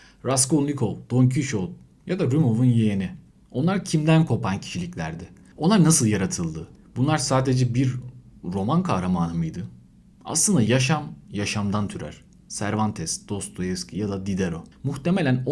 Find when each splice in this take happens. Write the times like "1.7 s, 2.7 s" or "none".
none